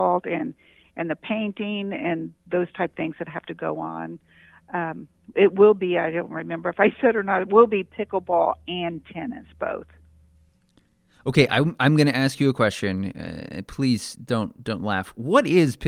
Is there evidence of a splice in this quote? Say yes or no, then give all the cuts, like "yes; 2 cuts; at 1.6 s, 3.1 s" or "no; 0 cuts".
no; 0 cuts